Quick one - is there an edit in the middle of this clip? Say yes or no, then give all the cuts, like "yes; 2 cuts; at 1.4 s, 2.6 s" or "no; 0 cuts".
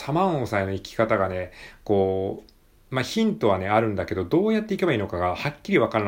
no; 0 cuts